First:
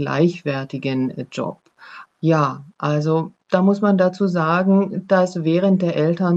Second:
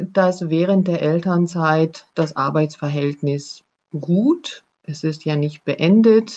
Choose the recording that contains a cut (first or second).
first